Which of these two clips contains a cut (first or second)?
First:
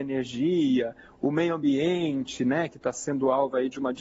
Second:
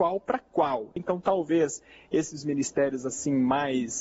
second